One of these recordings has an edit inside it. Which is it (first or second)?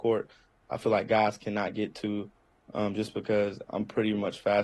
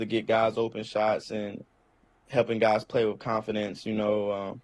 first